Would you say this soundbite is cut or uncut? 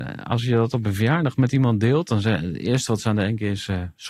uncut